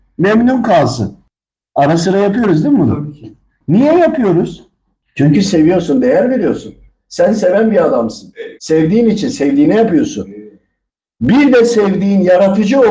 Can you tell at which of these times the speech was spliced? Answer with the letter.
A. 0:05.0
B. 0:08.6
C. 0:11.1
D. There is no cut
B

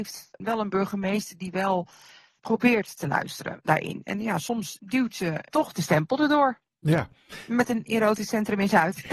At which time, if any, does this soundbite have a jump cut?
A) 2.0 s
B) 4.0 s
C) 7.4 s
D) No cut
D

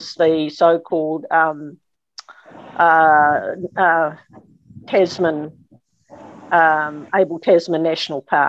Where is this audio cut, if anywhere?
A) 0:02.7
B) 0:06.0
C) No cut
C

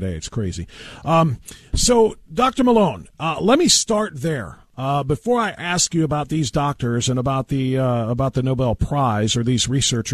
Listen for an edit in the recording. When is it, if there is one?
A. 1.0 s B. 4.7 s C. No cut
C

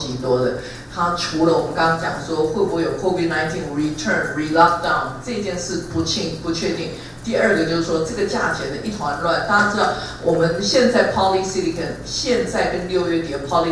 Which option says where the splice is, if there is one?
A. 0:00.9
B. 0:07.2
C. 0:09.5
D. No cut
D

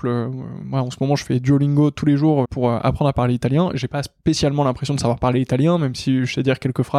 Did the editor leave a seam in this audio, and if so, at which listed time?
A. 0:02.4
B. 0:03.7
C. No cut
A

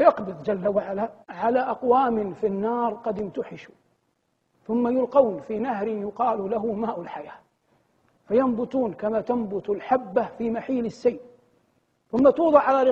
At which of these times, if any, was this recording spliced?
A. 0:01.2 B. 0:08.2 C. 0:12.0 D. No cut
A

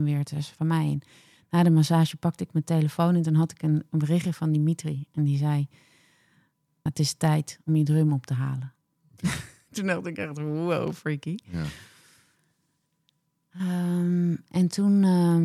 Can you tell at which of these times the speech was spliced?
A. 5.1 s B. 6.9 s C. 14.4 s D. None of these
B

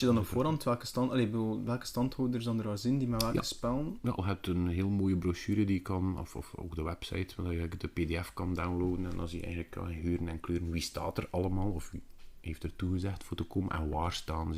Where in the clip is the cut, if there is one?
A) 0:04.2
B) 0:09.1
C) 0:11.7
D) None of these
A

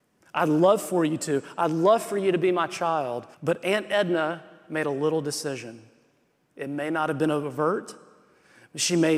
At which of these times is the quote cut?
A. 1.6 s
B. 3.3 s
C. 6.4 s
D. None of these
B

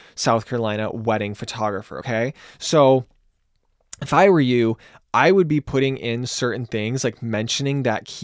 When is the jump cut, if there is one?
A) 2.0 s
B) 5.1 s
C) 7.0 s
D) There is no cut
D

